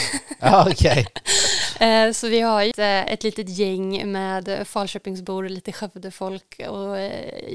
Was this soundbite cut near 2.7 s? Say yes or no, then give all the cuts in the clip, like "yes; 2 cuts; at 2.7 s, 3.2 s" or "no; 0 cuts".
yes; 1 cut; at 2.7 s